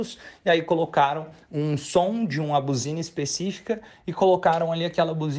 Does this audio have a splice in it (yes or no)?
no